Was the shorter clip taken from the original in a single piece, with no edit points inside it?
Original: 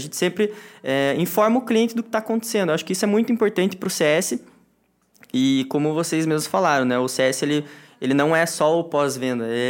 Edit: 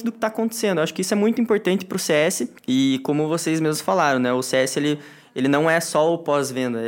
no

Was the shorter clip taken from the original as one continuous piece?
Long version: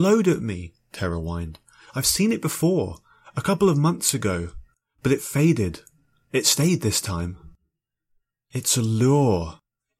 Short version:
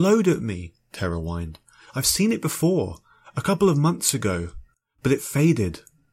yes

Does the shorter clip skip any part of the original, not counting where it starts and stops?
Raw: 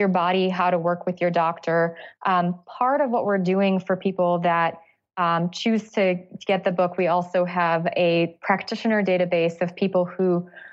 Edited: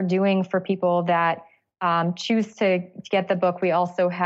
no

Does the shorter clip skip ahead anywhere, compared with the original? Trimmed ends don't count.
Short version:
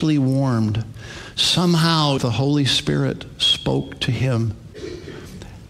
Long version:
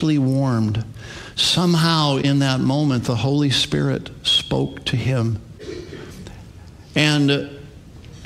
yes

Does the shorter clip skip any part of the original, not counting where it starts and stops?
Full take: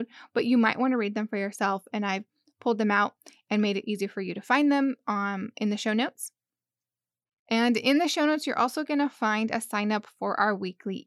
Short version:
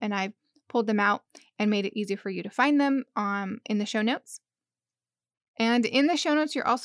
no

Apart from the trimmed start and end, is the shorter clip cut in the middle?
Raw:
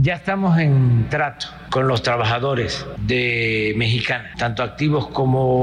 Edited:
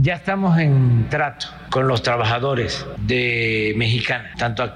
no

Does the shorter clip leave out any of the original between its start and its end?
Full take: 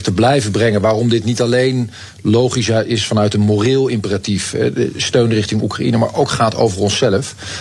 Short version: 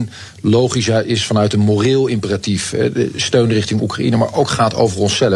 no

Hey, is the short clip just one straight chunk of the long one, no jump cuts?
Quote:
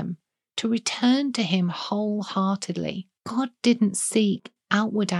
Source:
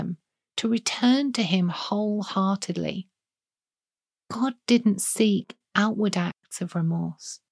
no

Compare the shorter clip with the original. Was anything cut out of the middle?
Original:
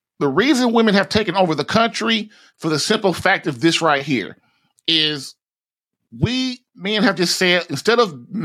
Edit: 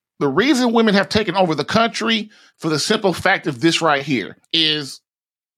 yes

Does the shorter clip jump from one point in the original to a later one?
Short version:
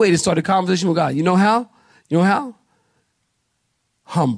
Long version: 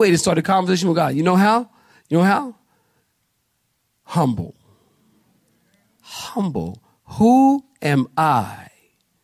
no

